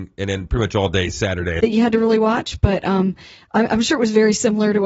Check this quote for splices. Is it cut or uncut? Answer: cut